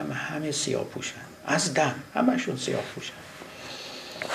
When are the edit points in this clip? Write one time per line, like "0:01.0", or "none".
0:02.1